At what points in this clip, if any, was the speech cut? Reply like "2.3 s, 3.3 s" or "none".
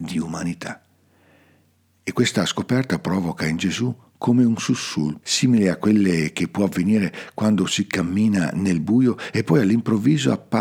5.2 s